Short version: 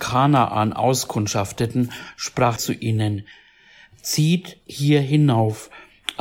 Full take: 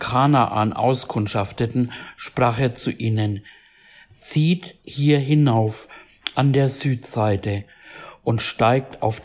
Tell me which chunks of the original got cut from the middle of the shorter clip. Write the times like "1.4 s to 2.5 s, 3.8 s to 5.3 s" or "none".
2.6 s to 2.7 s